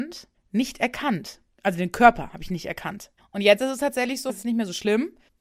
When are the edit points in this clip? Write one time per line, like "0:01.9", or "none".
0:03.2
0:04.3